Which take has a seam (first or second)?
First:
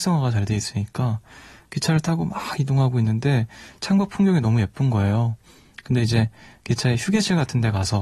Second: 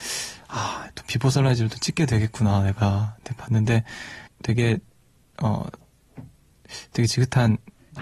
second